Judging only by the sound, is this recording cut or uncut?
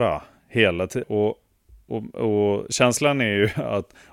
cut